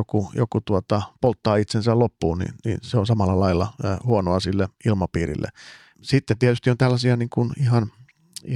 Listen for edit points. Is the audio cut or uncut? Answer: cut